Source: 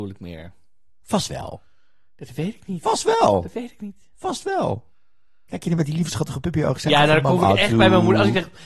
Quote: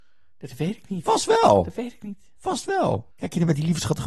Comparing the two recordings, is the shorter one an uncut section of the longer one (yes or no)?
no